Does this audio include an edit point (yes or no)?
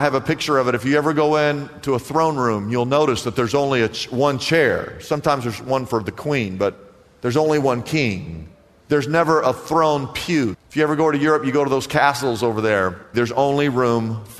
yes